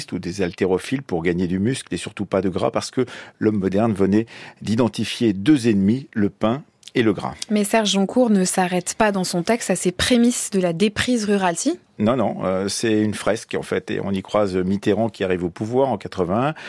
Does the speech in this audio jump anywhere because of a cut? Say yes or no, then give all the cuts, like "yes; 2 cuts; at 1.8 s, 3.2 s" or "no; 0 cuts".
no; 0 cuts